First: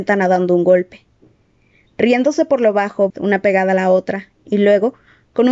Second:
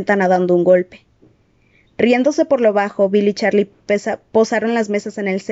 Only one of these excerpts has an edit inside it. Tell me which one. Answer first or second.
first